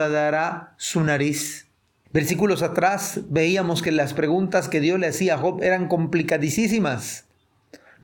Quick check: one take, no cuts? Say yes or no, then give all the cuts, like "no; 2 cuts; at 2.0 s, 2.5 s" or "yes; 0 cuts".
no; 1 cut; at 2.0 s